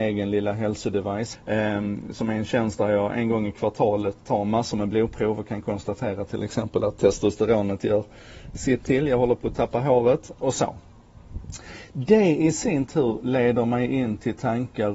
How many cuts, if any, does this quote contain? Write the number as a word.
two